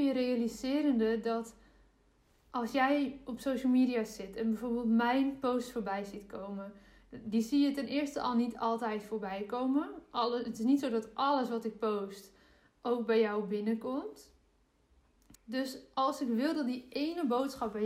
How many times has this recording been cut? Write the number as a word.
one